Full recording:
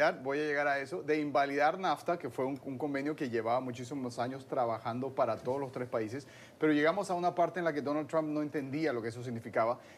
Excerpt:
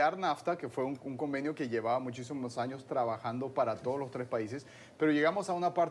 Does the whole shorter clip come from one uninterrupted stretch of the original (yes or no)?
yes